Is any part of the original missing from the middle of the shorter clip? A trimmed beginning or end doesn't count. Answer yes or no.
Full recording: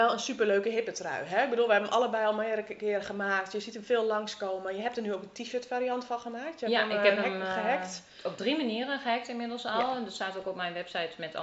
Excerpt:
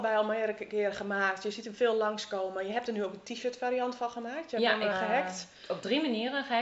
yes